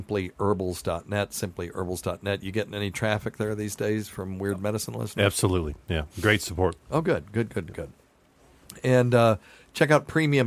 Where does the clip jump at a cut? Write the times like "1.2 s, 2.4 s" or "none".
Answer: none